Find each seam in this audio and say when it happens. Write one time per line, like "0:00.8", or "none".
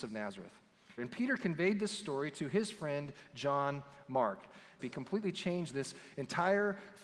0:01.0
0:04.8